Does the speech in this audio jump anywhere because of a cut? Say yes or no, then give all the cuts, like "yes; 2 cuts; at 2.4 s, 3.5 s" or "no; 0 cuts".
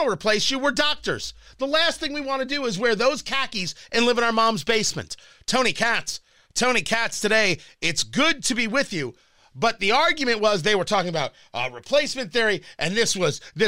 no; 0 cuts